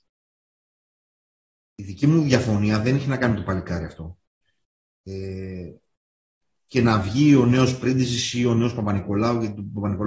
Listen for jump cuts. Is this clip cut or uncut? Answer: cut